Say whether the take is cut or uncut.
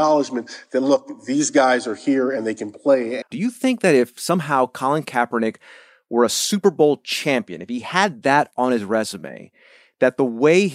cut